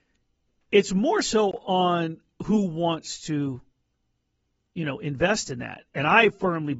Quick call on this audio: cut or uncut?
uncut